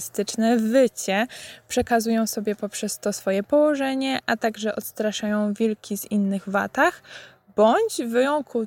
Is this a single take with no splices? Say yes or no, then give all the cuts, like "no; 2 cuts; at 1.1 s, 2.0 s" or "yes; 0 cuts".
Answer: yes; 0 cuts